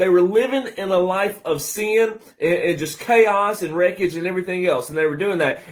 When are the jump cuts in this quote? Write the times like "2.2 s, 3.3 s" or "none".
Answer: none